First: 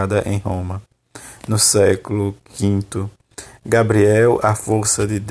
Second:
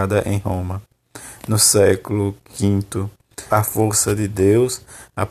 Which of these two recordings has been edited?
second; 1 cut; at 3.5 s

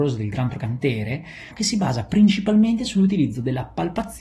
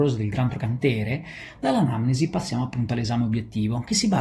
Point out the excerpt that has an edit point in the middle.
first; 1 cut; at 1.5 s

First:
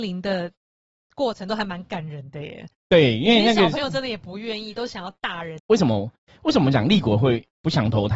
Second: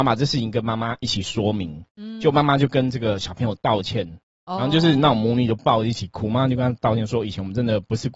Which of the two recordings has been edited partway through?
first; 1 cut; at 5.6 s

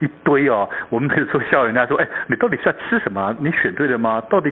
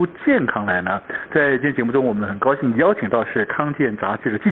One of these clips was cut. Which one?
first; 2 cuts; at 1.1 s, 3.4 s

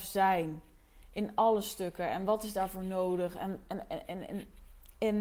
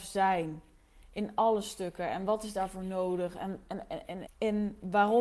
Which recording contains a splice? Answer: second; 1 cut; at 4.3 s

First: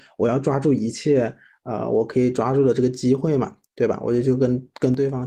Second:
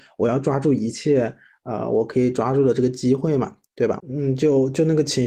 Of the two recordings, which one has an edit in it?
second; 1 cut; at 4.0 s

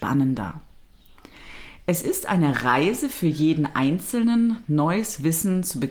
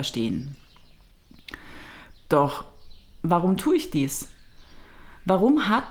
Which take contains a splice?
second; 1 cut; at 2.2 s

